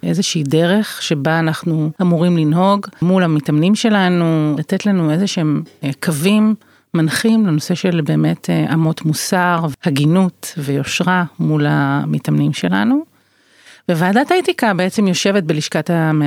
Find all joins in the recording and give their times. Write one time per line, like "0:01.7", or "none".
0:04.6